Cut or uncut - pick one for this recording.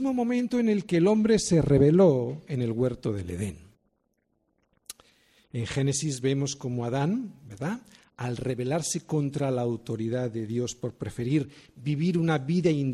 uncut